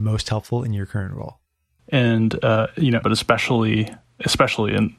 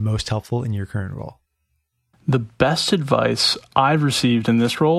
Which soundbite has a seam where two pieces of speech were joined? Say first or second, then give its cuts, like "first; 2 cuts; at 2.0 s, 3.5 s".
first; 2 cuts; at 1.8 s, 3.0 s